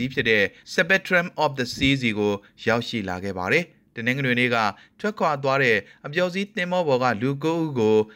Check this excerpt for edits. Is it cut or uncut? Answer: uncut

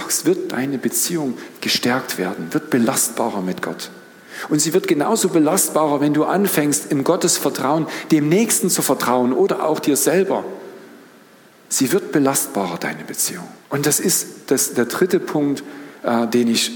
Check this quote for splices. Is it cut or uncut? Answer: cut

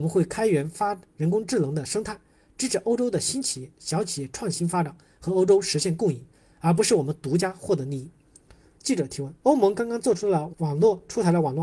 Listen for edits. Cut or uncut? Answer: cut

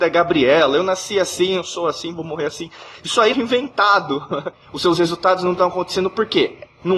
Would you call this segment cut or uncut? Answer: cut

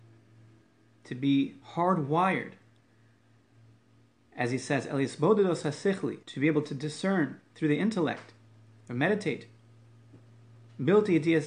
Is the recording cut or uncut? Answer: cut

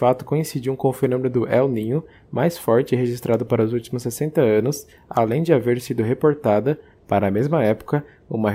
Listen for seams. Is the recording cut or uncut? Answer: uncut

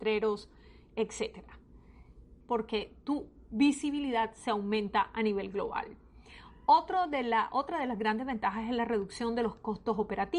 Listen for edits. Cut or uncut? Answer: cut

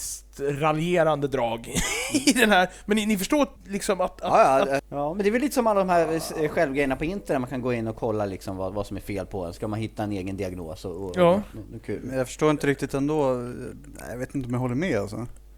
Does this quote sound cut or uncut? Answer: cut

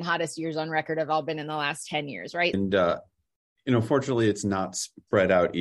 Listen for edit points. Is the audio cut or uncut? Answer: cut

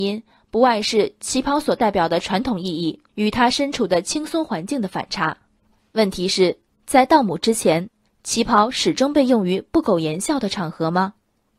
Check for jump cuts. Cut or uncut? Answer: uncut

